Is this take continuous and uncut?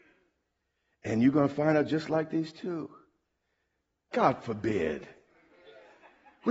no; 1 cut; at 4.1 s

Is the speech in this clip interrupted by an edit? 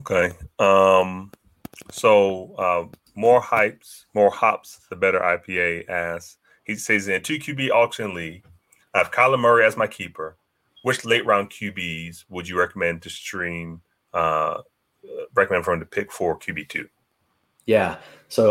no; 0 cuts

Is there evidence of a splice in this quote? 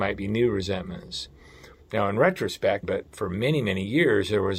yes; 2 cuts; at 1.7 s, 2.8 s

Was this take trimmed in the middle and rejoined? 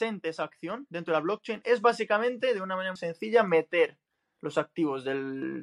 yes; 1 cut; at 3.0 s

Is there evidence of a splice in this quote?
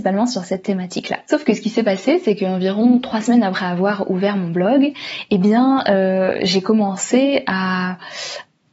no; 0 cuts

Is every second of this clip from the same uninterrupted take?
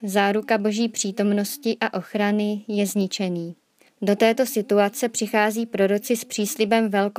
no; 1 cut; at 3.9 s

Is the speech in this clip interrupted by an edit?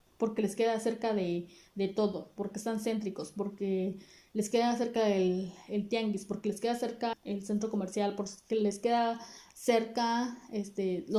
yes; 1 cut; at 7.1 s

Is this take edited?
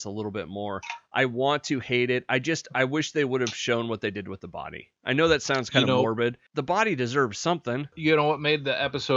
no; 0 cuts

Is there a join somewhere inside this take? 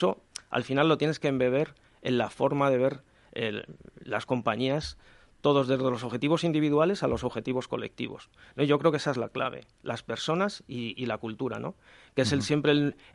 no; 0 cuts

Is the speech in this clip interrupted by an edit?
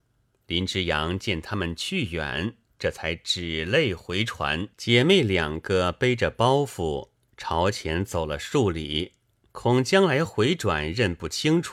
yes; 2 cuts; at 4.7 s, 9.5 s

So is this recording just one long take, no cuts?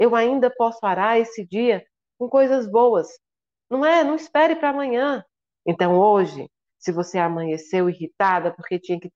no; 1 cut; at 5.6 s

